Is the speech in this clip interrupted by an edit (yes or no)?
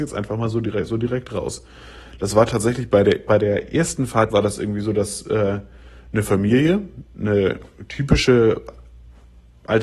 yes